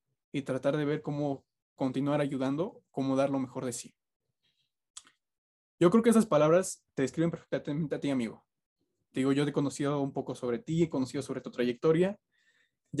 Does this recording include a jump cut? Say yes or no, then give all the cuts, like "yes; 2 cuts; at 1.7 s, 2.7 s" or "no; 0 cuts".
no; 0 cuts